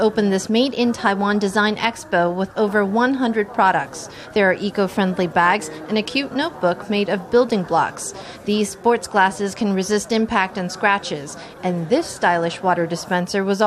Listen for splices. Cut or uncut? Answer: uncut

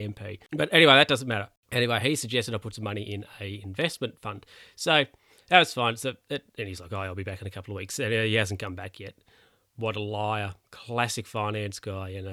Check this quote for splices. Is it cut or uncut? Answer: uncut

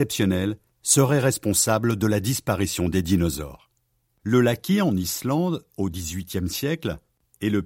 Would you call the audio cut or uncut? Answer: cut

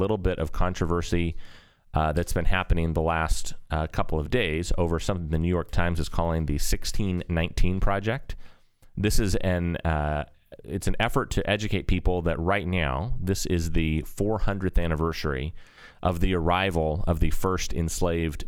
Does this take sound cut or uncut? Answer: uncut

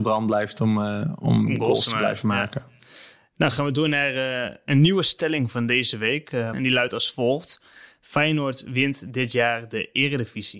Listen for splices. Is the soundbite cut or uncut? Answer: cut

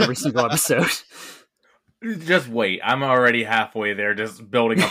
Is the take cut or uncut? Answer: uncut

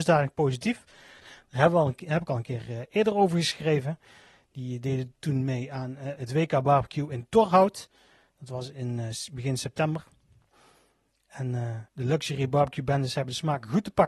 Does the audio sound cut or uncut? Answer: cut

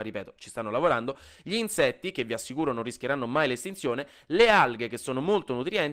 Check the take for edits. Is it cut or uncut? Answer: uncut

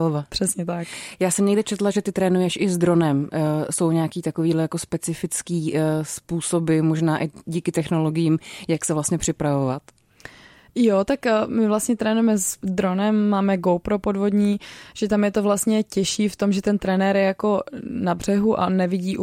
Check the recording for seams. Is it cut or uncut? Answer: uncut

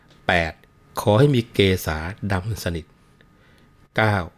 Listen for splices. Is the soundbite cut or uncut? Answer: uncut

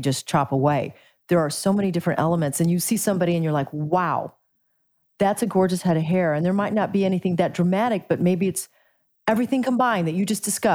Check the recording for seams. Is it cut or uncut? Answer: uncut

